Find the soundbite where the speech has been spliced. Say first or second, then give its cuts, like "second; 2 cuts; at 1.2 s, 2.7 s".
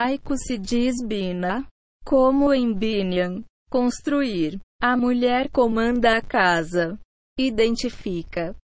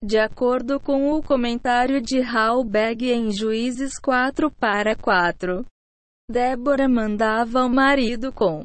second; 1 cut; at 6.2 s